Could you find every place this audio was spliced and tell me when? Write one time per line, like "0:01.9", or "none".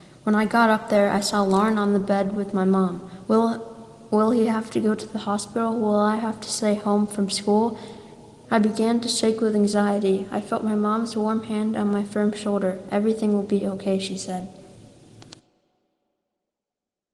0:03.2
0:08.4

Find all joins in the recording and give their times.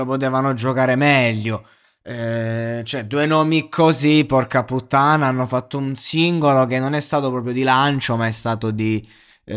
none

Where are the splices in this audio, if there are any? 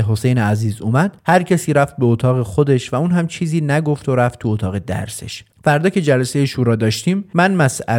0:05.5

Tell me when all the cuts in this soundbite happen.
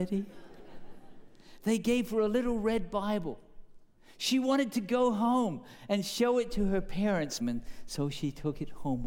0:07.4

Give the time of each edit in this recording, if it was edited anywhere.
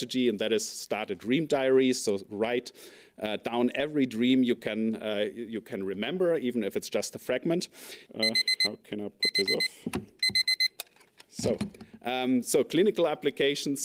0:08.1

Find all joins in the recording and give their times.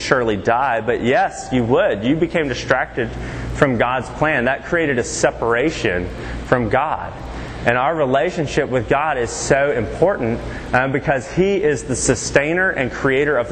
none

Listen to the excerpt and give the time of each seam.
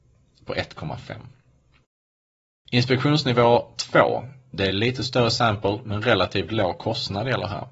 none

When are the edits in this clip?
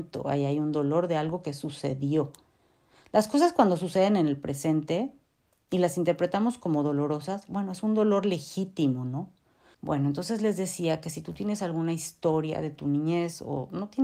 0:09.7

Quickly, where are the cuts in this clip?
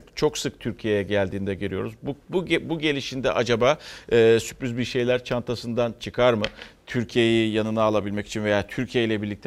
none

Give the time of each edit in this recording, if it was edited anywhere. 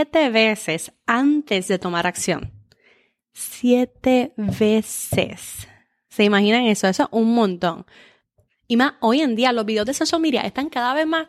none

